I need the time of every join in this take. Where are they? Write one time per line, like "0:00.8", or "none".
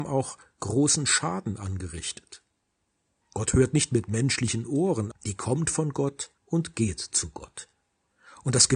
0:03.2
0:05.1
0:06.4